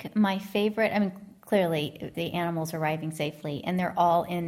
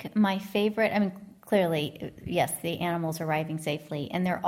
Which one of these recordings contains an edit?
first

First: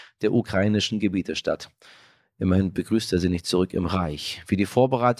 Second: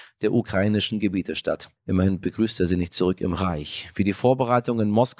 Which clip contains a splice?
second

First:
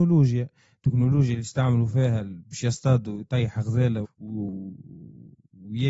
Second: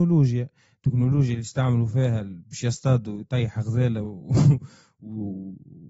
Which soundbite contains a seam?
first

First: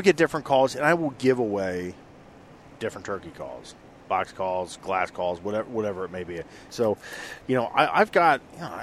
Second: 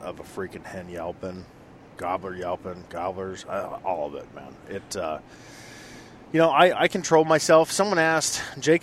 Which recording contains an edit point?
first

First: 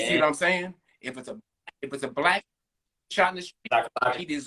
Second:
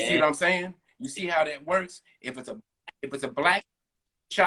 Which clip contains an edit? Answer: first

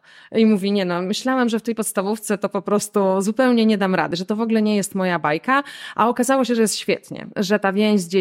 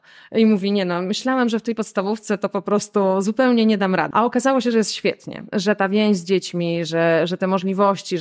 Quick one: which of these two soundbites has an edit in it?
second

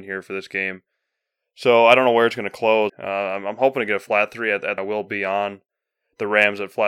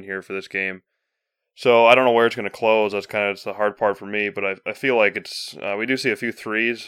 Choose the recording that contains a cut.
first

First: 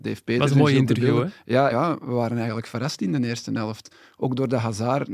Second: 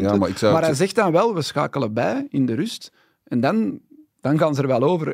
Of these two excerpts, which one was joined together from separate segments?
first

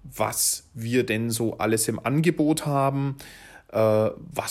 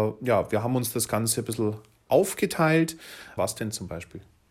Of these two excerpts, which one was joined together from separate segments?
second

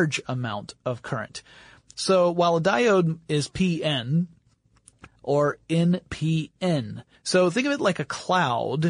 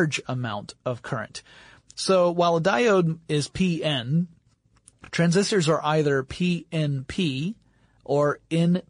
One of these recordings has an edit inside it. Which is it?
first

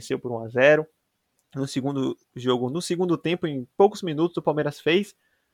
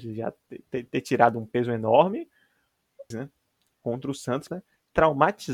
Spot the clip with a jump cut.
second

